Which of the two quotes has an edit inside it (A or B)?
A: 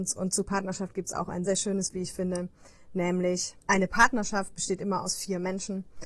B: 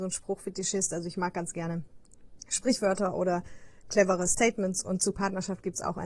A